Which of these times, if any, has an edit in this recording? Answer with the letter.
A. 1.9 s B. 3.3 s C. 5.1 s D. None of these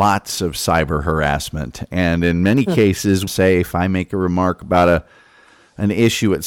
B